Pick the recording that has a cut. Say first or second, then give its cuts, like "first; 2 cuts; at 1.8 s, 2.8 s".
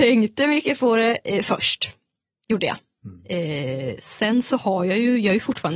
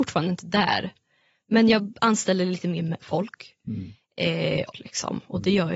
second; 1 cut; at 4.7 s